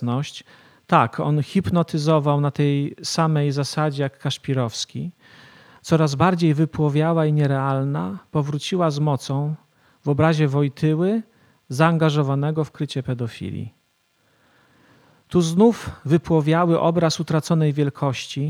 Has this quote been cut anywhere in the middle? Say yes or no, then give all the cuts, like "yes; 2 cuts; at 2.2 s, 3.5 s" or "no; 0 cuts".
no; 0 cuts